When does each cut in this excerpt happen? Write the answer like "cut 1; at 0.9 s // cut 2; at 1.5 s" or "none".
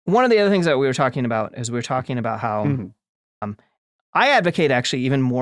cut 1; at 3.4 s

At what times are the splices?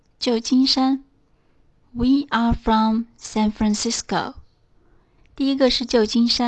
cut 1; at 5.2 s

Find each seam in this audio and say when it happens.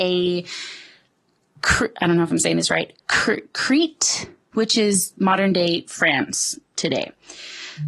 cut 1; at 3.0 s // cut 2; at 4.5 s

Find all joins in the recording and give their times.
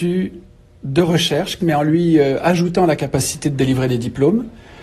cut 1; at 1.6 s

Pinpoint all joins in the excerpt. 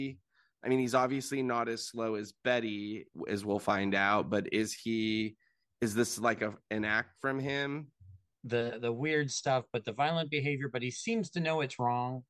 cut 1; at 8.3 s

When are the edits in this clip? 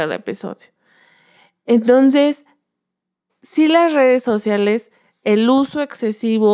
cut 1; at 3.3 s

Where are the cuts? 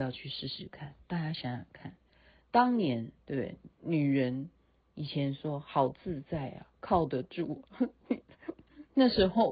none

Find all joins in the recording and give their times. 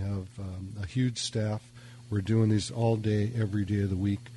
none

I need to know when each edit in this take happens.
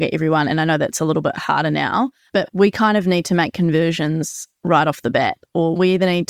none

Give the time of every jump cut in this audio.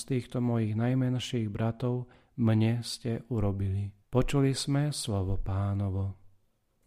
cut 1; at 4.0 s

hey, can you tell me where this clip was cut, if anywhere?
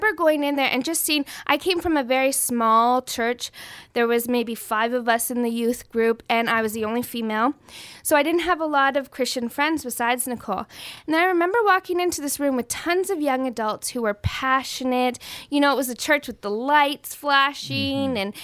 none

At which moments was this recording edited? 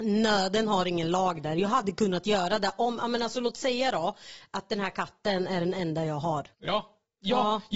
cut 1; at 6.5 s

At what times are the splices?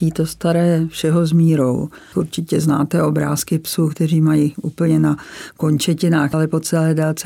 cut 1; at 2.1 s // cut 2; at 6.3 s

